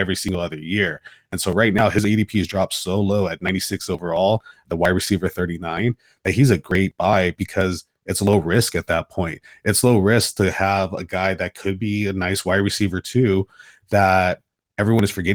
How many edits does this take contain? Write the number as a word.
zero